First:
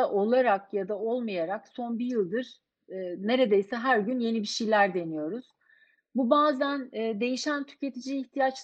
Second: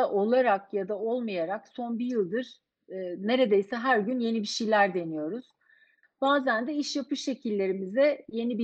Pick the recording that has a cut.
second; 1 cut; at 6.0 s

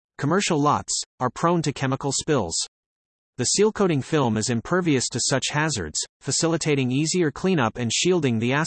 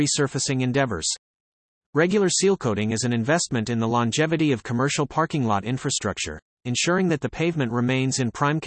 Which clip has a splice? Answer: first; 1 cut; at 1.1 s

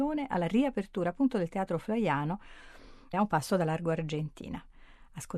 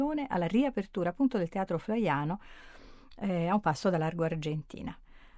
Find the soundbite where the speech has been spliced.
first; 1 cut; at 3.1 s

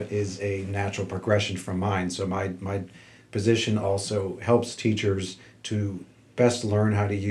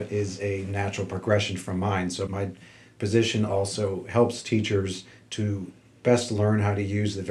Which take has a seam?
second; 1 cut; at 2.3 s

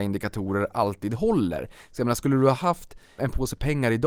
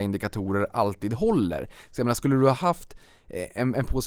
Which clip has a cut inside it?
first; 1 cut; at 3.2 s

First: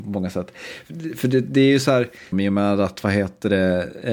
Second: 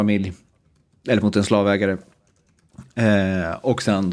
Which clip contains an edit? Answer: first; 1 cut; at 2.3 s

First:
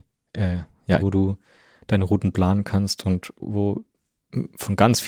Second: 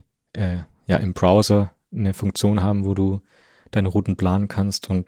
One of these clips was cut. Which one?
first; 2 cuts; at 1.0 s, 3.4 s

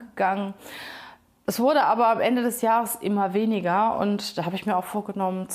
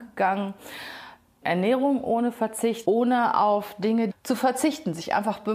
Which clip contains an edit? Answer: second; 3 cuts; at 1.4 s, 2.8 s, 4.1 s

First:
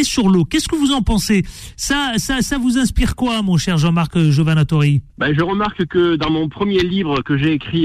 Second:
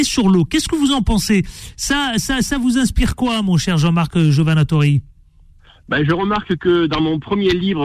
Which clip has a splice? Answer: first; 1 cut; at 5.1 s

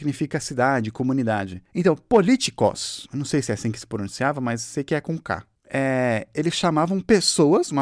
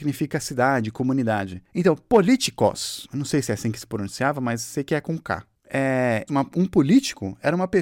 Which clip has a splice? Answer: second; 1 cut; at 6.3 s

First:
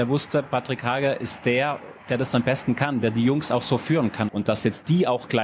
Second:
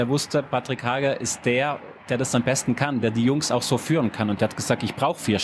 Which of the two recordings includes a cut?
first; 1 cut; at 4.3 s

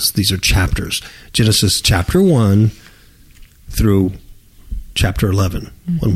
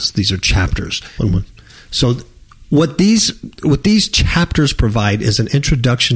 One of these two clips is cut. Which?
second; 1 cut; at 1.2 s

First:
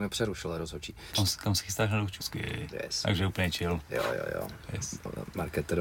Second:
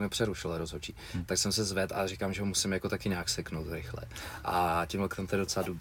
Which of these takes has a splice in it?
first; 2 cuts; at 1.1 s, 2.2 s

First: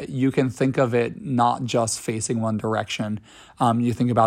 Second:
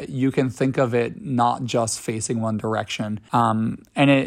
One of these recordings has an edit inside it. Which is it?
second; 1 cut; at 3.3 s

